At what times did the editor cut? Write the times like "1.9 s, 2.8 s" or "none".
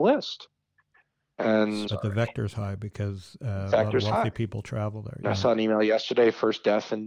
1.9 s, 5.2 s